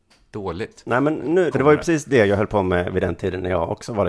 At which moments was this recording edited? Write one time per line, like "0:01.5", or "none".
0:01.5